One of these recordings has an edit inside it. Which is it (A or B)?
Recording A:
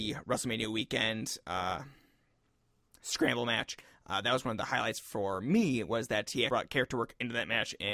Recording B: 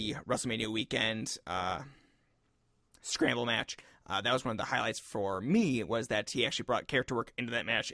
A